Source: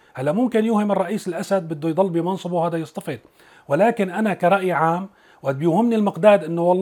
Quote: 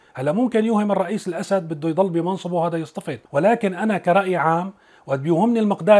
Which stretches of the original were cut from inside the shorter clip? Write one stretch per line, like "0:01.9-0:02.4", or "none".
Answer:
0:03.3-0:03.6